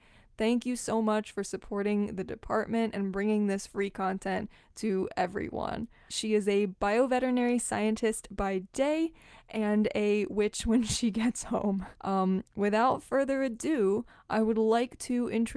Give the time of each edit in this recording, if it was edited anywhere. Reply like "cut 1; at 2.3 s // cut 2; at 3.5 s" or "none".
cut 1; at 6.1 s // cut 2; at 11.9 s